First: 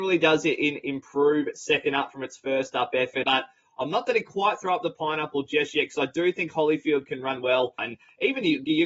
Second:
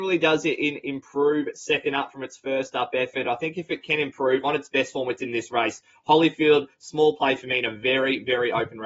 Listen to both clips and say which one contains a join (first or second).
first